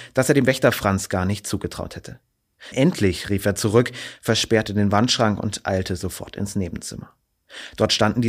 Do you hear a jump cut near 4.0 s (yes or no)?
no